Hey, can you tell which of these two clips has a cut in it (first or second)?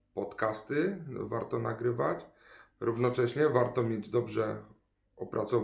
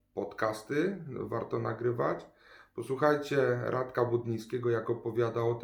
first